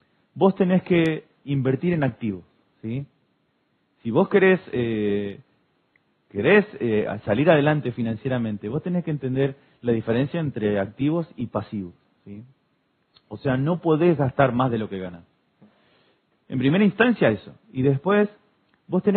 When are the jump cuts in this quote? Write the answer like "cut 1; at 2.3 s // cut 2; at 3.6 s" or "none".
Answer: none